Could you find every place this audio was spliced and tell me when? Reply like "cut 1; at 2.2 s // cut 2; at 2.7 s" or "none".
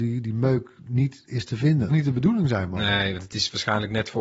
cut 1; at 1.9 s